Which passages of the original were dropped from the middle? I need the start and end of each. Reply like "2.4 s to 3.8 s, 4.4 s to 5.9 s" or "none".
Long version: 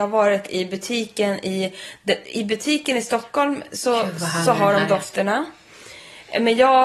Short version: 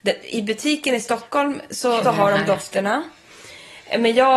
4.0 s to 4.4 s